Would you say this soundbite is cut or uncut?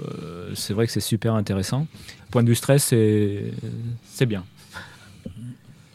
cut